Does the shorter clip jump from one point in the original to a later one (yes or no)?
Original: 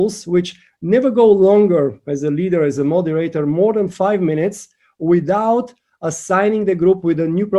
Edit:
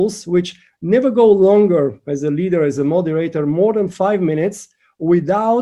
no